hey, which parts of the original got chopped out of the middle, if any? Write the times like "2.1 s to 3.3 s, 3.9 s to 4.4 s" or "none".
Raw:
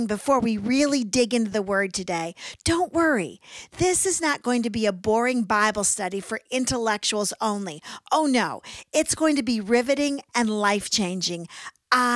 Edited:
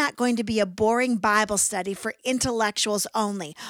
none